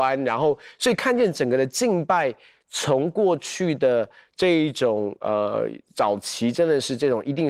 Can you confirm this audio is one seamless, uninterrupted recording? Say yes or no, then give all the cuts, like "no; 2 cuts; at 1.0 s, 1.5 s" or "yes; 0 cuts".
yes; 0 cuts